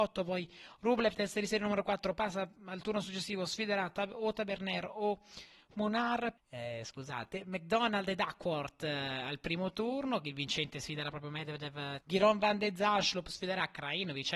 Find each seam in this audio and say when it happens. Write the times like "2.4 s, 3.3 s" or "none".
6.4 s, 12.0 s